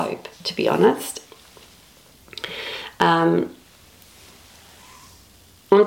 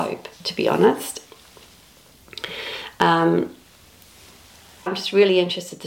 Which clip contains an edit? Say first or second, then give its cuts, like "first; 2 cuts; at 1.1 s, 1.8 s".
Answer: second; 1 cut; at 4.9 s